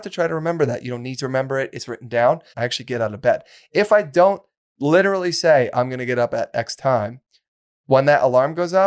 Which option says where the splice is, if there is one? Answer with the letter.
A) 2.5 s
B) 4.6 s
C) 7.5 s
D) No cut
A